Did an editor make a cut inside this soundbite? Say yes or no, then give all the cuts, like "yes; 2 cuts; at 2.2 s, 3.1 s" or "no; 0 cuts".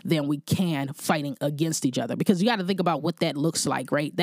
no; 0 cuts